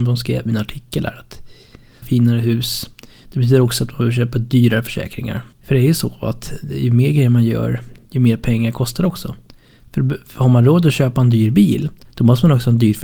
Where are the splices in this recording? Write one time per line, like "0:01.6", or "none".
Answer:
0:02.0
0:05.5